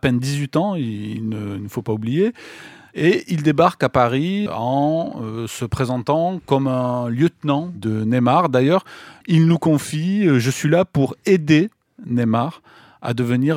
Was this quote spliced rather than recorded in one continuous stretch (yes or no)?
yes